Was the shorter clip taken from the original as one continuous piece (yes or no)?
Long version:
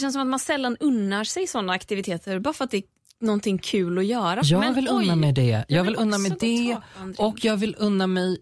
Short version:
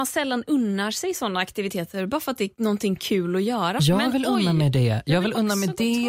no